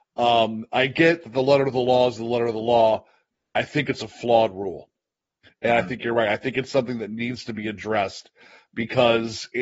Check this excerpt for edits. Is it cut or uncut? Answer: uncut